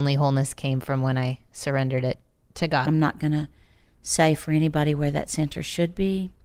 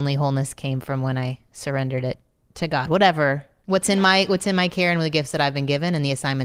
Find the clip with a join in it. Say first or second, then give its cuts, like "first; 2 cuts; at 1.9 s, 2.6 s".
first; 1 cut; at 2.9 s